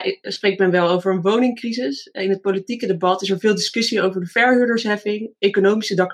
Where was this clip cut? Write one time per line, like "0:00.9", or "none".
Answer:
none